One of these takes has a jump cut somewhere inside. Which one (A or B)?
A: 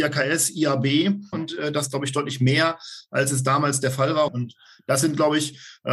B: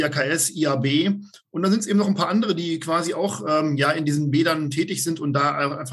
A